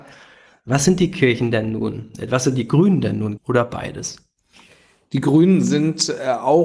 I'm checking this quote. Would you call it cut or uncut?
cut